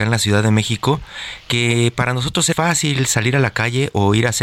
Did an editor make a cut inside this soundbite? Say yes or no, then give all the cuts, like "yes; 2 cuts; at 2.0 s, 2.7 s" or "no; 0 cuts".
yes; 1 cut; at 2.5 s